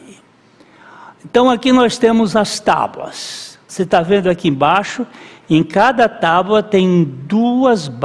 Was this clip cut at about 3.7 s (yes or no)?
yes